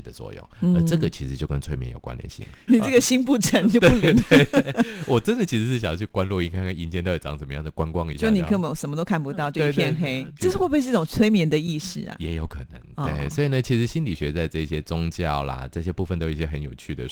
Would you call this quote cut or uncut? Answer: cut